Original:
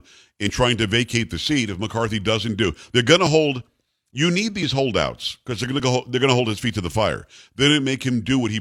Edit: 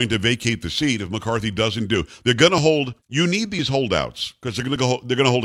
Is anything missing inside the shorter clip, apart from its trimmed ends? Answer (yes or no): yes